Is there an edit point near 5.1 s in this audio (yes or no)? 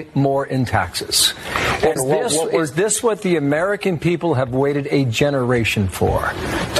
no